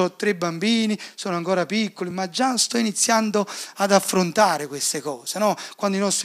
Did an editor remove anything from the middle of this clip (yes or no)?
no